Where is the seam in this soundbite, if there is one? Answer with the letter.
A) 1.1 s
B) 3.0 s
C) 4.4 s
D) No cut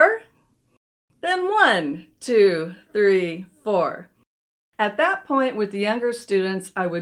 D